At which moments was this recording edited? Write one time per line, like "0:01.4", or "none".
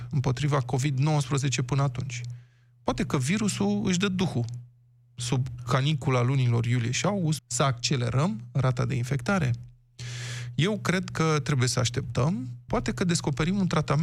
0:07.4
0:12.7